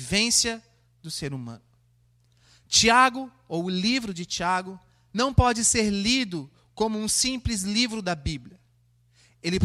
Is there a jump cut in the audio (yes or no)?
no